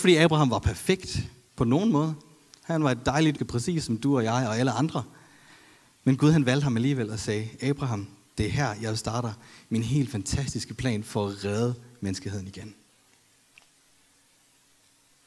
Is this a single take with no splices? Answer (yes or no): no